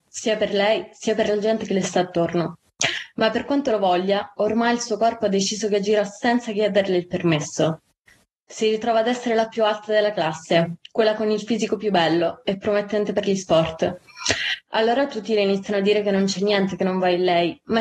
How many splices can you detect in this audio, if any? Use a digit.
0